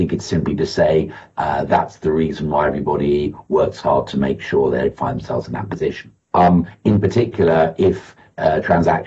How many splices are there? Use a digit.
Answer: 1